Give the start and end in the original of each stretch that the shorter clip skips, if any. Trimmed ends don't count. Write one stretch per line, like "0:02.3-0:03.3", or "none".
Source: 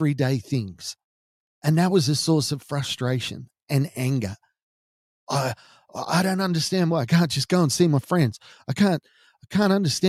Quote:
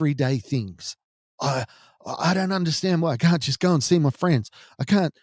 0:01.3-0:05.2

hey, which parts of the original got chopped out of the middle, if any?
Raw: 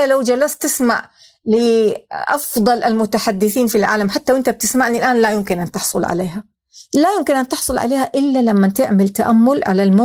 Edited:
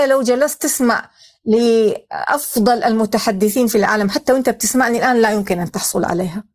none

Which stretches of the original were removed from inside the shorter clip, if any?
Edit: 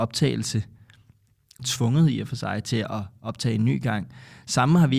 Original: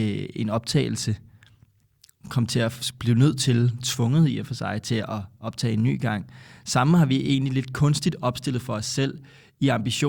0:02.1-0:03.8

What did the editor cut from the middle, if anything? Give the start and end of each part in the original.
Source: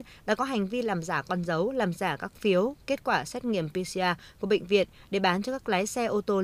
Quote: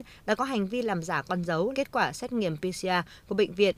0:01.7-0:02.8

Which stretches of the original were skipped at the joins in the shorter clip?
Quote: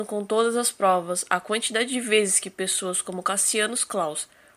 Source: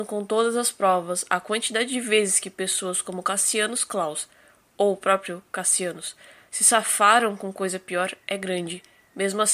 none

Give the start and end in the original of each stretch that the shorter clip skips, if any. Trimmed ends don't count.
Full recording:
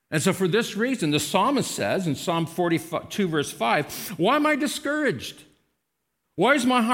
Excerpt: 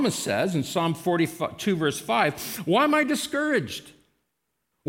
none

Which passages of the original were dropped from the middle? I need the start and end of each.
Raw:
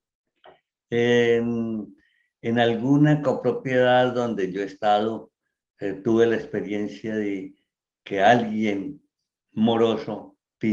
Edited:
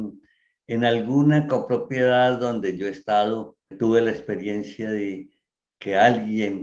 0:05.5-0:06.0

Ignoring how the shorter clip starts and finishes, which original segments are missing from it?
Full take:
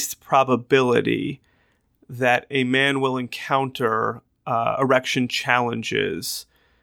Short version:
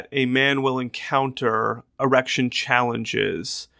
0:04.4-0:04.8

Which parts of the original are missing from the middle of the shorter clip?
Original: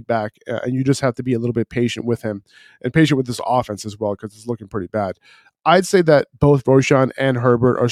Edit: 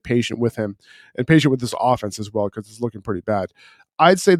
none

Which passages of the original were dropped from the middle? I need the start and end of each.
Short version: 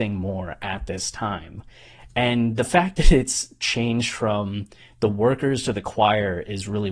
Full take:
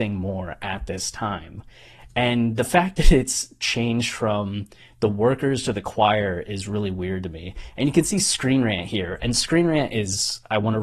none

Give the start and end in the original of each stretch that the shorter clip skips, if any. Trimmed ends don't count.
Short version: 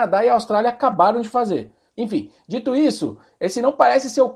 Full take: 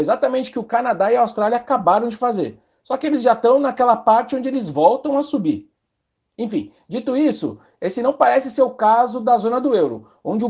0:02.8-0:06.3

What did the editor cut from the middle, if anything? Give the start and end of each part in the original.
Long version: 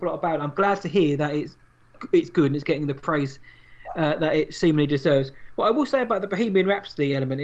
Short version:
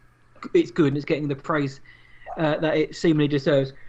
none

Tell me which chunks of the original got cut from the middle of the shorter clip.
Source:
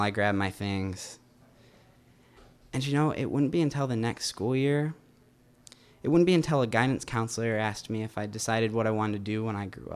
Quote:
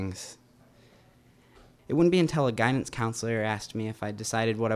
0:02.6-0:05.9

